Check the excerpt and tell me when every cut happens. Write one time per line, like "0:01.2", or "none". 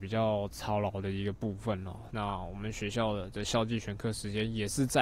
0:02.1